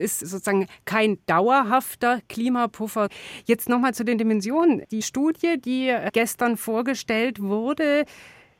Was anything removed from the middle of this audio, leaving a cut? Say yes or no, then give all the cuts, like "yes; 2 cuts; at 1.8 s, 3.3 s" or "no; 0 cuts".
no; 0 cuts